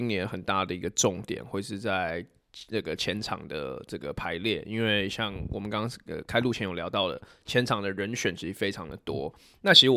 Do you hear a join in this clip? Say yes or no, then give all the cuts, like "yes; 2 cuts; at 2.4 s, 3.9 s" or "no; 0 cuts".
no; 0 cuts